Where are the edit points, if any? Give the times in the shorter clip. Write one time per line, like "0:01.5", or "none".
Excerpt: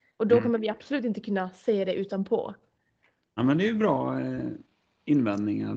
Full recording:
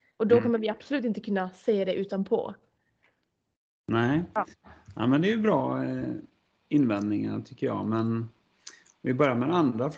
0:03.4